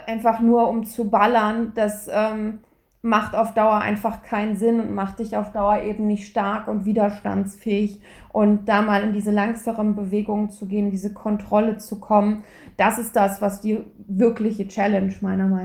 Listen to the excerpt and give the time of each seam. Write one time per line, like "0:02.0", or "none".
none